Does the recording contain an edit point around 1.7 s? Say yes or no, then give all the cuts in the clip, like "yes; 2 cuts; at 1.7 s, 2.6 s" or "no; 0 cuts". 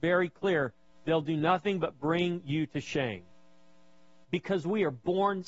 no; 1 cut; at 4.2 s